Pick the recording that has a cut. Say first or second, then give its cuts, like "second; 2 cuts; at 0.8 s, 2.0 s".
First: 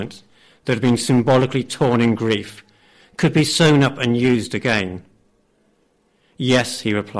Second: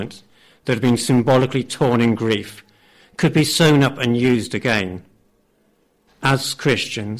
second; 1 cut; at 6.1 s